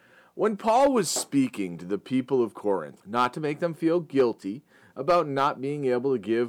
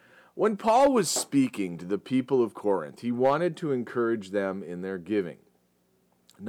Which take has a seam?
first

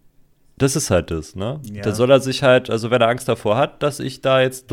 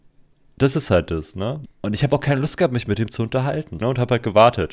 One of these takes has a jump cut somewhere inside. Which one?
second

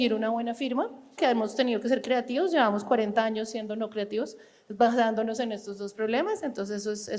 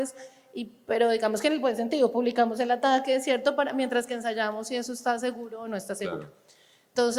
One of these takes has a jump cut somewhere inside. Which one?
first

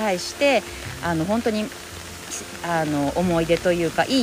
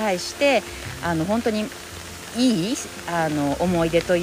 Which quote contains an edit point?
first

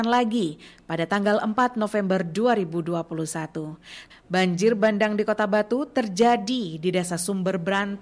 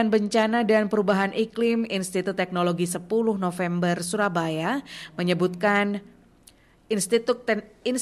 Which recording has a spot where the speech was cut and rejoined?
first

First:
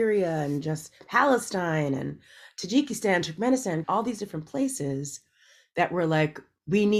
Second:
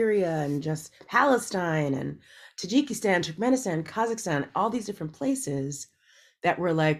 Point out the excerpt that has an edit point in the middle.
first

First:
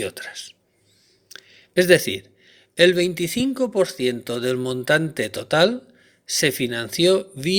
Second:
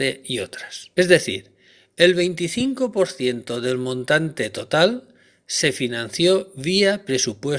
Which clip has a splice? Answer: second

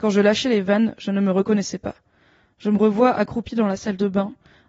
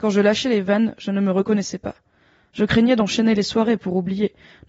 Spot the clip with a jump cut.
second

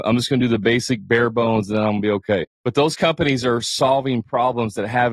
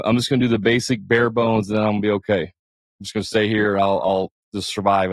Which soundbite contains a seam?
first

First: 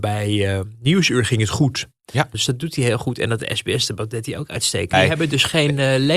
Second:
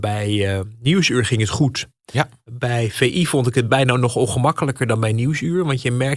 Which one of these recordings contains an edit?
first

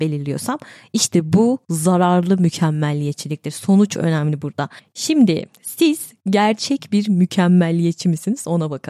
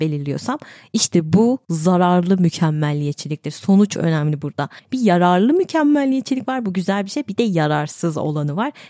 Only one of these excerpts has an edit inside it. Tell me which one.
second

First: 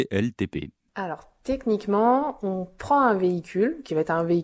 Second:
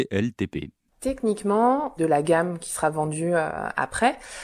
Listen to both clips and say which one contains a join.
second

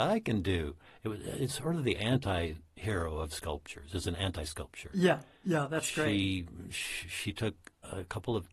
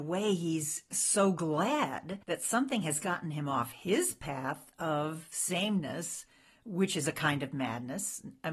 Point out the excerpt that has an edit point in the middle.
second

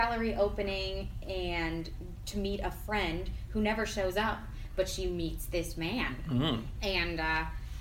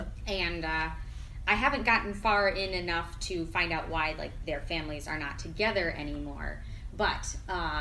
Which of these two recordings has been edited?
first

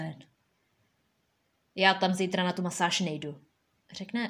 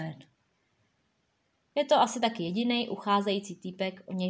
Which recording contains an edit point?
second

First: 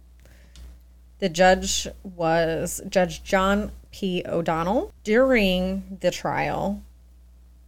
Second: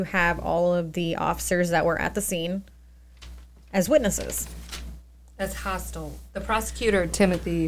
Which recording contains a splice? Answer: first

